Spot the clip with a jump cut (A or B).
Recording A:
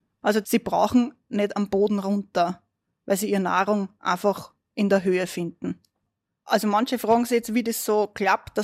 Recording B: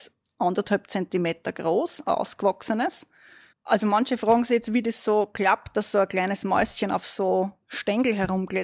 B